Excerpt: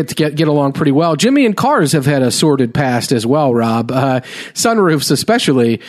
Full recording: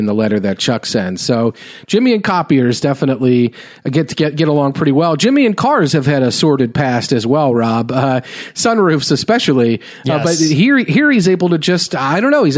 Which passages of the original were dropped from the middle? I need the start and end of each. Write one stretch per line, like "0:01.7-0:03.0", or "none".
none